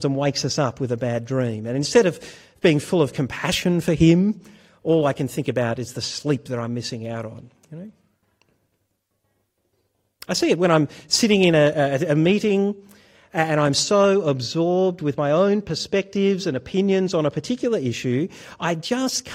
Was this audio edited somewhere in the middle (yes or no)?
no